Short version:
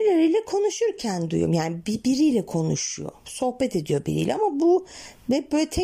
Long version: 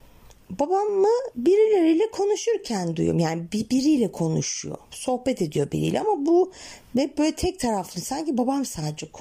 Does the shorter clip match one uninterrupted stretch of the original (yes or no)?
yes